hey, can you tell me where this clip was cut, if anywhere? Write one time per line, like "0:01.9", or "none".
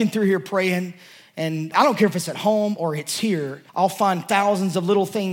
0:01.7
0:03.7